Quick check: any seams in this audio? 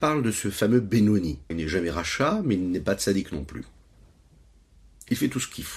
yes; 1 cut; at 1.5 s

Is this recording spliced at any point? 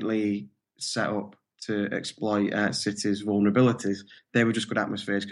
yes; 1 cut; at 4.2 s

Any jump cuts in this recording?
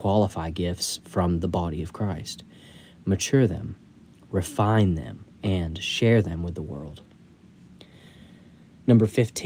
yes; 1 cut; at 5.3 s

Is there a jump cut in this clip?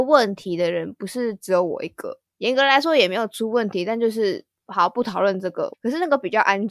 yes; 1 cut; at 5.7 s

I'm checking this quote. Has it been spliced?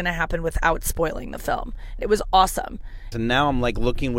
yes; 2 cuts; at 2.0 s, 3.1 s

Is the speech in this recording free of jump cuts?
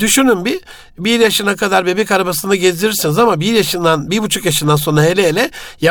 yes; 0 cuts

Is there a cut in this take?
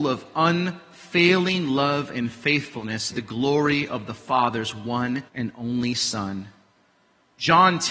yes; 2 cuts; at 3.1 s, 5.3 s

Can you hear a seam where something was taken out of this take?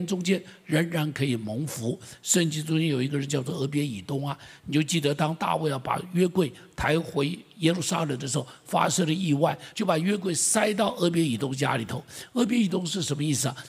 yes; 1 cut; at 9.7 s

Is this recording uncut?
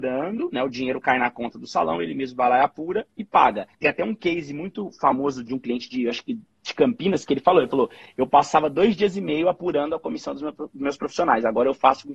no; 2 cuts; at 3.7 s, 5.5 s

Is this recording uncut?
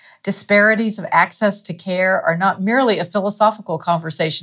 yes; 0 cuts

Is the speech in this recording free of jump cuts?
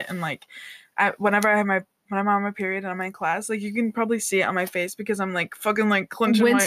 yes; 0 cuts

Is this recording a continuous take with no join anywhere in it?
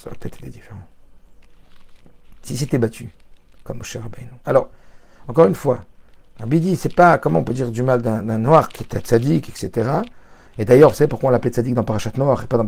yes; 0 cuts

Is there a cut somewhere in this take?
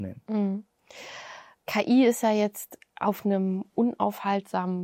no; 0 cuts

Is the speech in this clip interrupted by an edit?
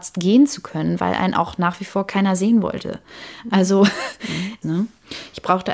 yes; 1 cut; at 4.6 s

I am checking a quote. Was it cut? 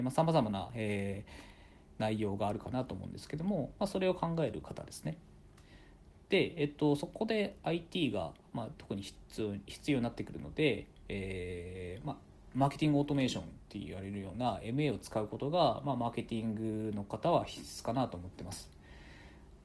no; 0 cuts

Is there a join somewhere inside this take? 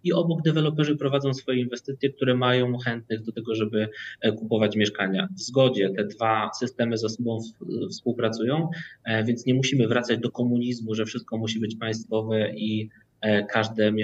no; 0 cuts

